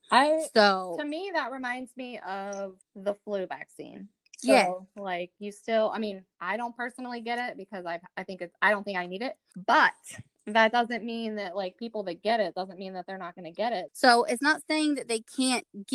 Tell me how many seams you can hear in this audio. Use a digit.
2